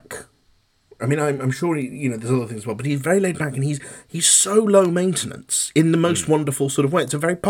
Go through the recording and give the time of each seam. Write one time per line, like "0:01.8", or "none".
none